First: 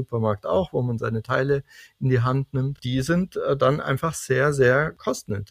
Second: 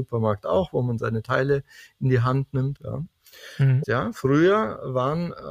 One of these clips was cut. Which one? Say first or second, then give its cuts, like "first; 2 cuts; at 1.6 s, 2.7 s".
second; 2 cuts; at 2.8 s, 3.8 s